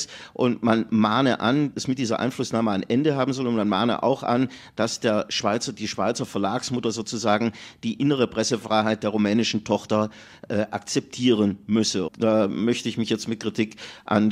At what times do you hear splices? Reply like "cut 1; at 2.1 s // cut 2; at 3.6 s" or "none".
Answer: cut 1; at 1.7 s // cut 2; at 12.1 s

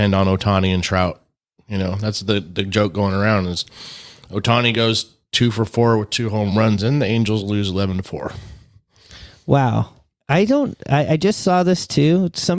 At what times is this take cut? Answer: cut 1; at 6.8 s

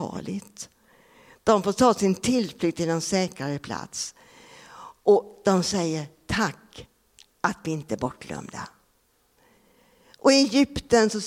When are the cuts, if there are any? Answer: none

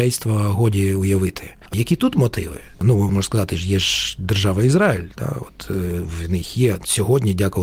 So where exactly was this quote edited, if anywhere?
none

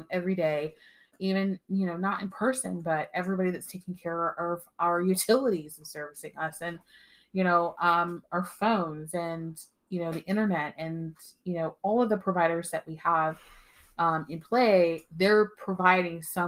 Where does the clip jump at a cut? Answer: none

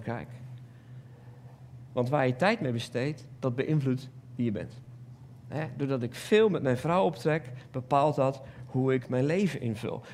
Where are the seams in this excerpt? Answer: cut 1; at 1.9 s

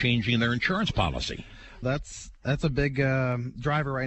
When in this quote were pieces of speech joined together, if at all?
cut 1; at 1.8 s

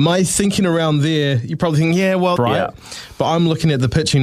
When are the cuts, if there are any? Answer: cut 1; at 2.4 s

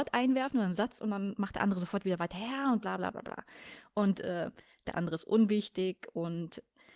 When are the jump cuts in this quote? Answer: cut 1; at 3.1 s // cut 2; at 4.8 s

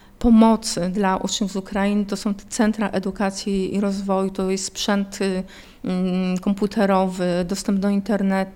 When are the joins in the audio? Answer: none

